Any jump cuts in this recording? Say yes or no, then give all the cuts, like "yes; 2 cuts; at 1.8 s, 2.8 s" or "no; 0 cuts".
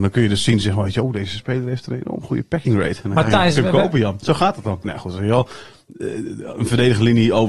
yes; 1 cut; at 4.8 s